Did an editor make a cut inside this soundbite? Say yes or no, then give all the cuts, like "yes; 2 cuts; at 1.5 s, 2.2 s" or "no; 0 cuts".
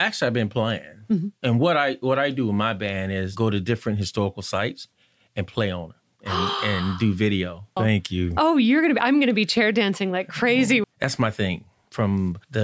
yes; 2 cuts; at 7.8 s, 10.8 s